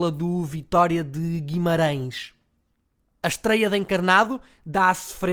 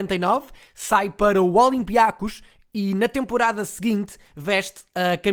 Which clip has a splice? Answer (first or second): first